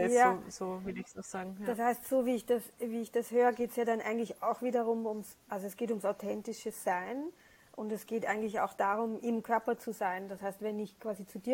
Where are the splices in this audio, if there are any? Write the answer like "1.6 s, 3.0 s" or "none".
none

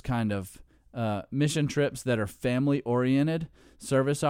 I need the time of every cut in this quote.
none

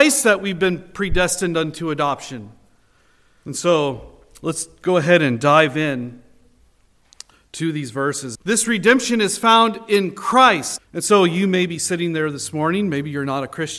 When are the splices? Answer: 3.4 s, 8.3 s, 10.8 s

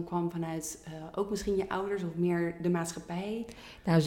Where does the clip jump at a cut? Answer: none

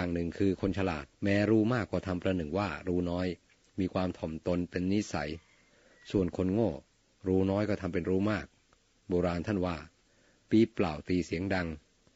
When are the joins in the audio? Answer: 1.1 s

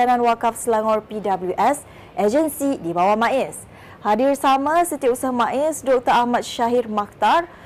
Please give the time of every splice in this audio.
none

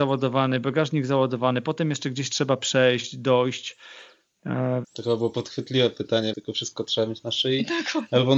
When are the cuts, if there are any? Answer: 4.8 s, 6.3 s

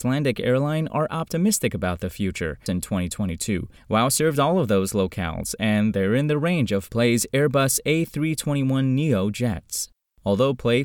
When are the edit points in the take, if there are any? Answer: 2.7 s, 3.8 s

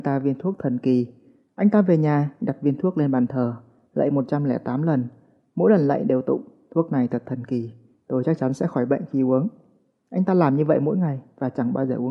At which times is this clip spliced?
none

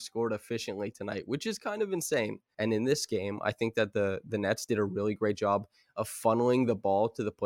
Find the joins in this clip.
2.5 s

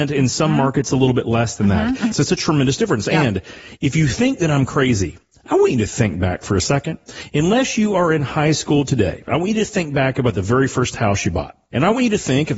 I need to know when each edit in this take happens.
2.1 s

